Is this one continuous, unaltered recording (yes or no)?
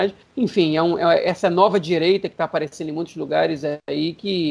yes